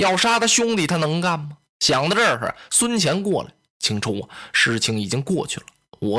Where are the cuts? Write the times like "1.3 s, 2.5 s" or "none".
1.7 s